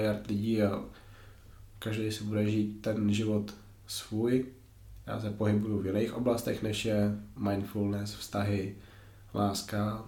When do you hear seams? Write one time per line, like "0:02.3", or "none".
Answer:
0:05.0